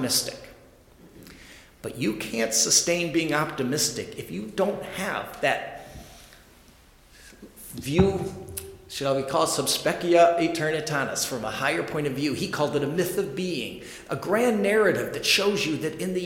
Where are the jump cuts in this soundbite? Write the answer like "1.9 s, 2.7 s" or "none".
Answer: none